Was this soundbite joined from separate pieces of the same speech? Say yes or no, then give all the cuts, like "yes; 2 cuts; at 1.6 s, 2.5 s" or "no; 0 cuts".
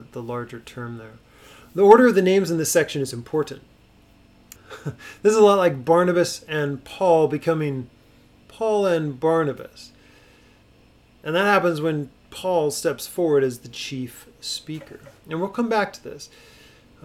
yes; 1 cut; at 4.6 s